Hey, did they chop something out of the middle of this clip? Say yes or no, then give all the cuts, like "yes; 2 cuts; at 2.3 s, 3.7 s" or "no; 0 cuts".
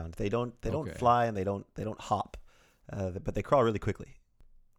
no; 0 cuts